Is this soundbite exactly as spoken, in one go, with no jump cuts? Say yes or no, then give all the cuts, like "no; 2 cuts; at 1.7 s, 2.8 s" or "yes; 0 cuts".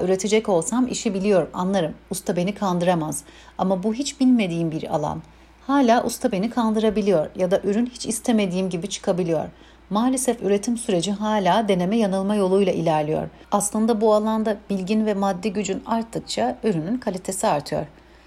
no; 1 cut; at 13.4 s